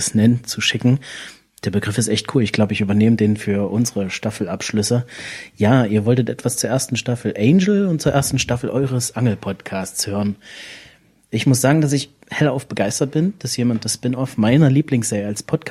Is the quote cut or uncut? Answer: uncut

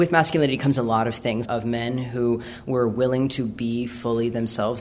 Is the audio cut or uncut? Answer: cut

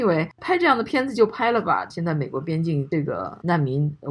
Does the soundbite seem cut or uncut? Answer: cut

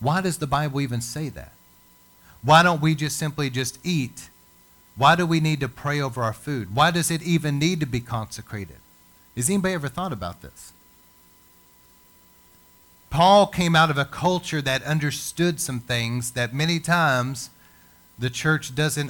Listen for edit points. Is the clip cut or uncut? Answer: uncut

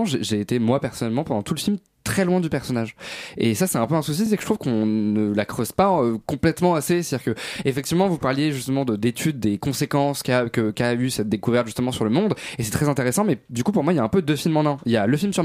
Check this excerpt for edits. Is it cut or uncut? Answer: uncut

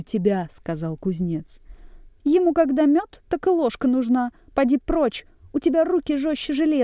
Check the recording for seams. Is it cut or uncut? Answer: cut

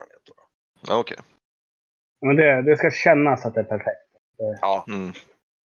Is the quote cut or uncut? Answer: uncut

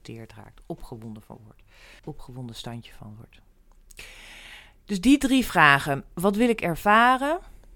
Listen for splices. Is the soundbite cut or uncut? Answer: cut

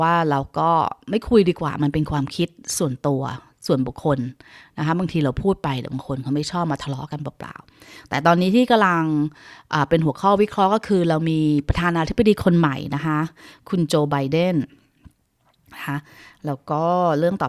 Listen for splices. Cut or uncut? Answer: uncut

